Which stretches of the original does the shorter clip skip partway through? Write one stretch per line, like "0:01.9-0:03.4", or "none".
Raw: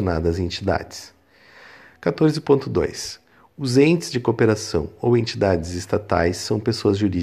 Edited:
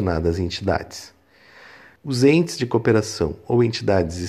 0:02.0-0:03.5